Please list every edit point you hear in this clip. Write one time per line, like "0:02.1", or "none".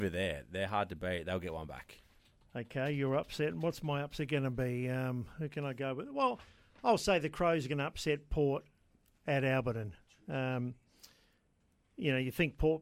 none